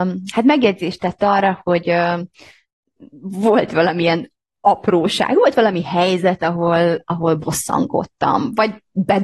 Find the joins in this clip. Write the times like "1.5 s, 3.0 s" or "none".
none